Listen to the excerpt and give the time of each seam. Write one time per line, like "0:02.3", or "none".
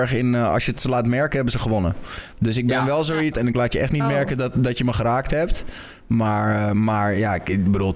0:03.3